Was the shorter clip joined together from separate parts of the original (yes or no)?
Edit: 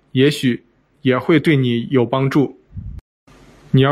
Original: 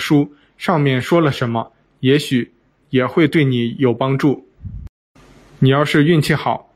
no